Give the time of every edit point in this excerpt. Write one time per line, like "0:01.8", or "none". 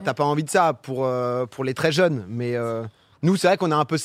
none